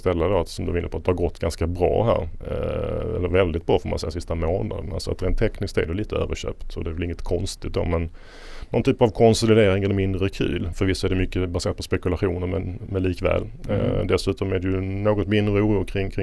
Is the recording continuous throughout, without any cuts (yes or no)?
no